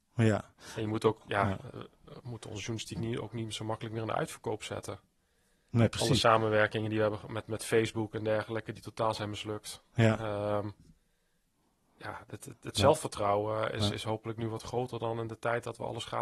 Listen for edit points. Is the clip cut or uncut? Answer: uncut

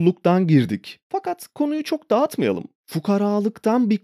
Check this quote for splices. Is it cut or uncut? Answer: cut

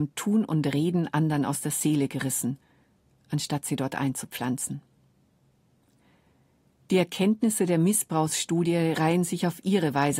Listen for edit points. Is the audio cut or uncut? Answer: uncut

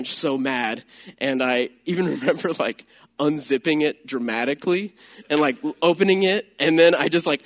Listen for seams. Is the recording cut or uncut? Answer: uncut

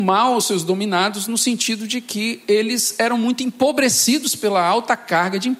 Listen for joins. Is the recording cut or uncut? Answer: uncut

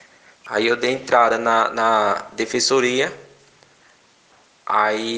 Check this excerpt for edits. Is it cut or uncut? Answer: uncut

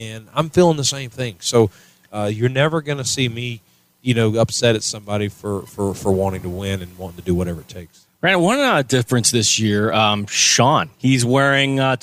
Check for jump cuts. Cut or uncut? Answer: cut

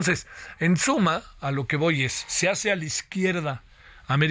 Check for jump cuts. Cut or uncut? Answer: uncut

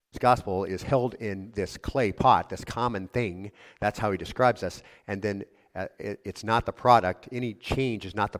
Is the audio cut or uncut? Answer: uncut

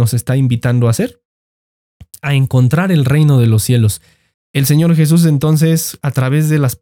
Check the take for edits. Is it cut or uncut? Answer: cut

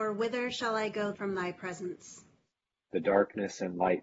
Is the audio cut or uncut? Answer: cut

